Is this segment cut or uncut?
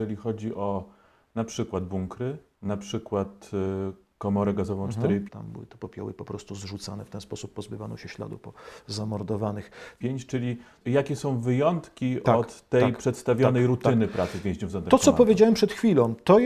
cut